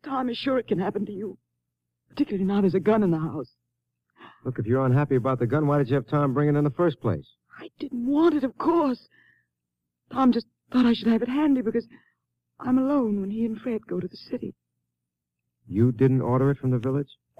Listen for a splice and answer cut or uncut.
uncut